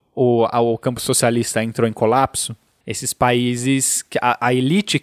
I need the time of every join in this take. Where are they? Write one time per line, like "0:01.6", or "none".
none

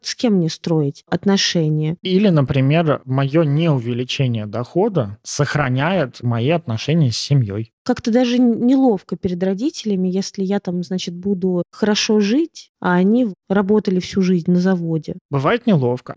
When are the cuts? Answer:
0:02.0

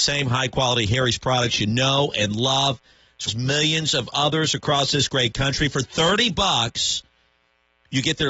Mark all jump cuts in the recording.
0:03.3

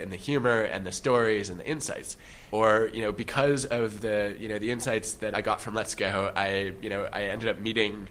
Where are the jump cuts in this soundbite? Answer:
0:02.5
0:05.3

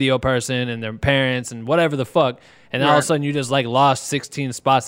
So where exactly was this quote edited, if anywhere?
none

